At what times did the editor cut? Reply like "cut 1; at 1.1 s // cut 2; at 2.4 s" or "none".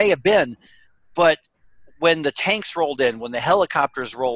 none

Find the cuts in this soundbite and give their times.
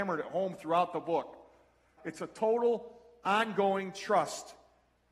cut 1; at 2.0 s

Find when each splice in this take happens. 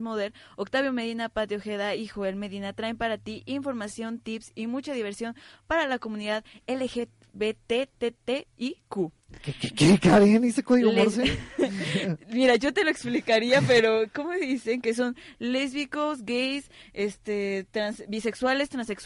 none

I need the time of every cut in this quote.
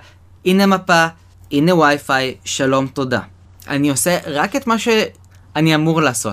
cut 1; at 1.4 s

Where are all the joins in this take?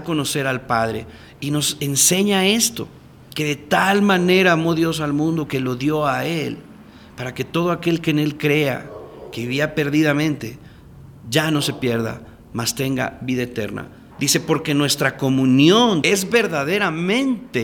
cut 1; at 14.1 s // cut 2; at 16.0 s

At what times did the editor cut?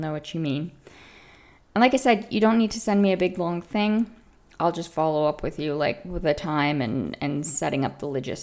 none

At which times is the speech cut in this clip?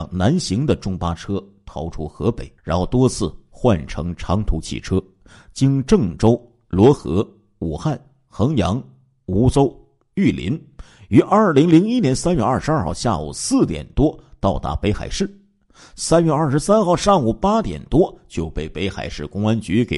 cut 1; at 2.6 s

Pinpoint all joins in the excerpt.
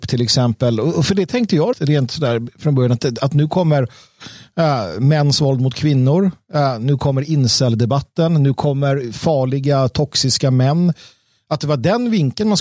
cut 1; at 1.7 s

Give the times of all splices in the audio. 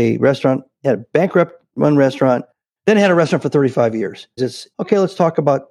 cut 1; at 2.8 s // cut 2; at 4.4 s

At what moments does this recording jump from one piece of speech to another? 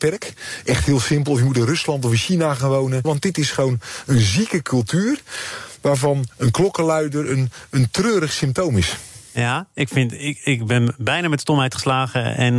cut 1; at 3.0 s

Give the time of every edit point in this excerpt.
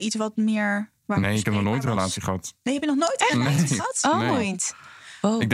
none

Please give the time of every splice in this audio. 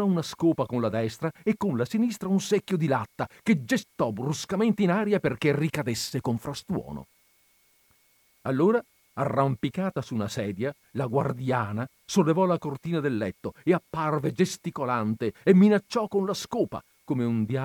cut 1; at 8.4 s // cut 2; at 15.3 s

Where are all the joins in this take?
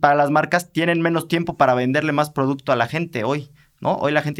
none

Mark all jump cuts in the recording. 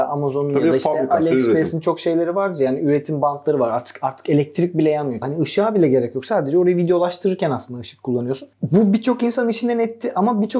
cut 1; at 5.2 s // cut 2; at 8.5 s

